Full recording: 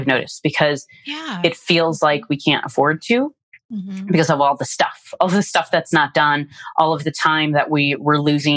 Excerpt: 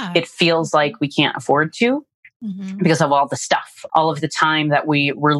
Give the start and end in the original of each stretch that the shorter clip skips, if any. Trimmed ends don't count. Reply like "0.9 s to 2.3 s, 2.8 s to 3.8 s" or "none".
5.2 s to 6.7 s